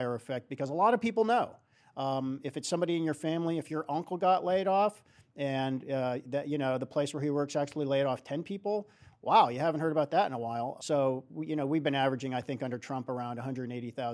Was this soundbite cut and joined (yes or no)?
yes